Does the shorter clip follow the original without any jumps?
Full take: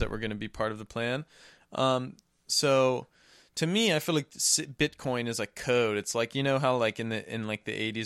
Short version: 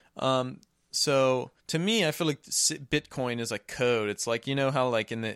no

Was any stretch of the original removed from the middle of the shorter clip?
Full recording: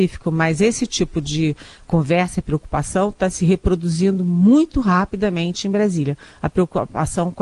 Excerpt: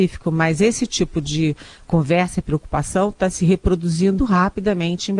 yes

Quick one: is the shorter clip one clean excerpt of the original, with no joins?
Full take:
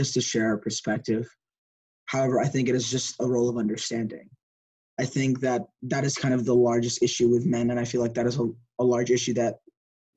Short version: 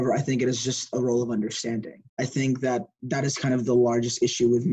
no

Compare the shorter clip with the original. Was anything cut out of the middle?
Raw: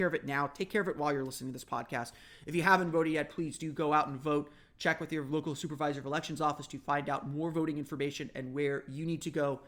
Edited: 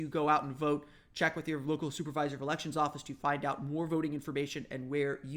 no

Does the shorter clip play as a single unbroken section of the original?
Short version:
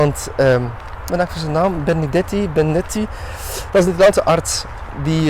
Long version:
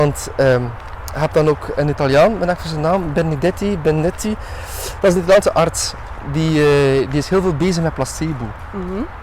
no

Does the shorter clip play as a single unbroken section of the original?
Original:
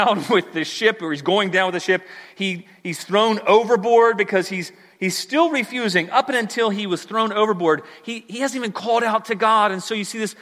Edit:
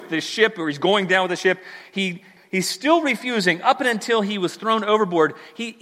no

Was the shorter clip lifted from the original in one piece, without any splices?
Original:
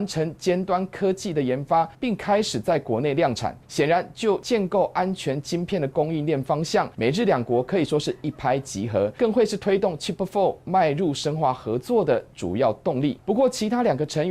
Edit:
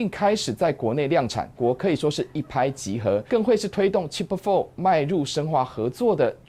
no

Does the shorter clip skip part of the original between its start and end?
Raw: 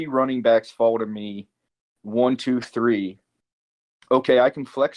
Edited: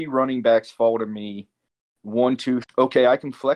yes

